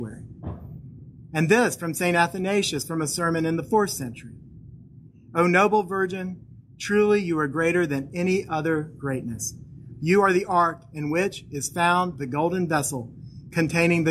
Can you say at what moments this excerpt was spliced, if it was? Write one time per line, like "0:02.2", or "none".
0:10.0

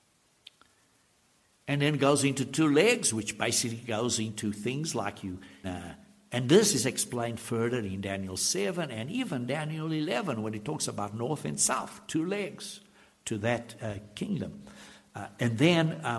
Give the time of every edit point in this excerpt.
0:05.6

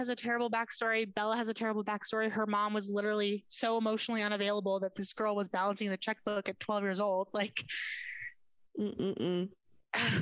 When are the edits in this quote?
none

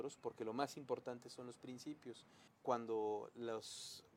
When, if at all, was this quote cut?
0:02.5

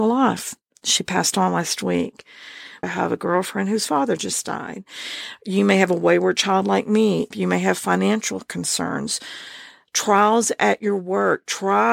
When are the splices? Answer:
0:02.8
0:07.3

